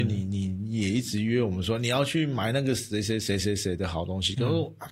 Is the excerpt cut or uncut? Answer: uncut